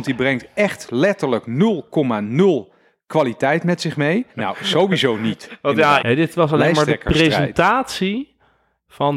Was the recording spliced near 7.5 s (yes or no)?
no